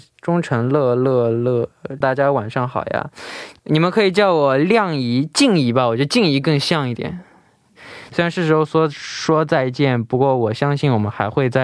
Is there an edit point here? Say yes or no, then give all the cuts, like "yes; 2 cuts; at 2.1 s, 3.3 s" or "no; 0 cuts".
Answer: yes; 2 cuts; at 2.0 s, 8.1 s